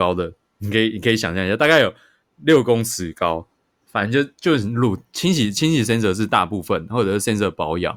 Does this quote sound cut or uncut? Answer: cut